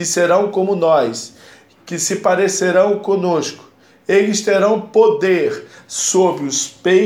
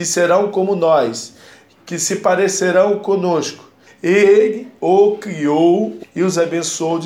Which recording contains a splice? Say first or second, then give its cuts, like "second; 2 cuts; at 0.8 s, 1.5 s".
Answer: second; 2 cuts; at 3.9 s, 6.0 s